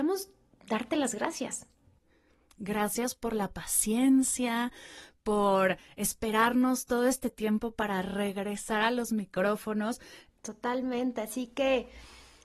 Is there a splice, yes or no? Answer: yes